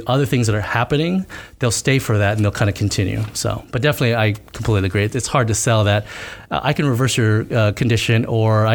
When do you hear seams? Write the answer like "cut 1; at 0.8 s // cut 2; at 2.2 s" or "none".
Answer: none